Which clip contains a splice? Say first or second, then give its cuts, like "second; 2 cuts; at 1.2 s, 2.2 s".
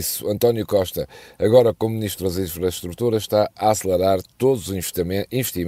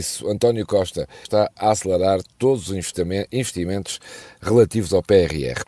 second; 1 cut; at 1.3 s